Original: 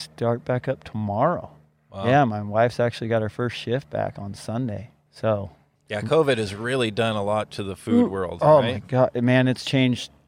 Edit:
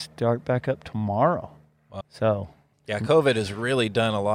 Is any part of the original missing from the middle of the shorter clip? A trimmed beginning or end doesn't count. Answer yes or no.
yes